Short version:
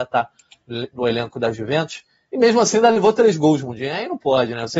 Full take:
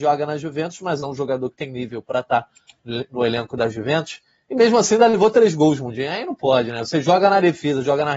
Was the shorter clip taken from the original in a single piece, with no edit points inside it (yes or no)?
yes